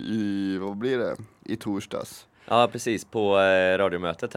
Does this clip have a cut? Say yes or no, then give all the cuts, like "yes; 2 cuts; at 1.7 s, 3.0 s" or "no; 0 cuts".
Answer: no; 0 cuts